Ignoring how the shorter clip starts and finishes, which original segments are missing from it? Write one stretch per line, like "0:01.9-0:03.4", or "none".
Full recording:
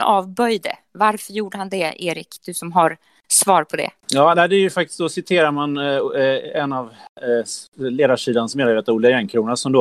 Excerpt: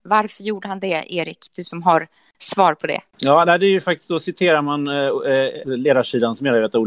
0:06.5-0:07.8